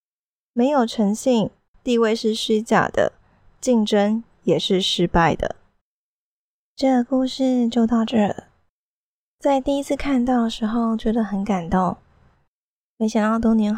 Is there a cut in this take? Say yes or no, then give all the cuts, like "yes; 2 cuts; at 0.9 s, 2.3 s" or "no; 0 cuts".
yes; 1 cut; at 1.7 s